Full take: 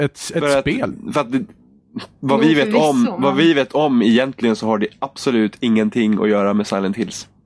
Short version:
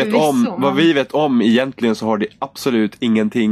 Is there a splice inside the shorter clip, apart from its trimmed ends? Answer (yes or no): no